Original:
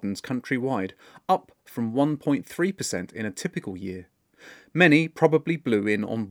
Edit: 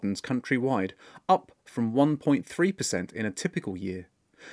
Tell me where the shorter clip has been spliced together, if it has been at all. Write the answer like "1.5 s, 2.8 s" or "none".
none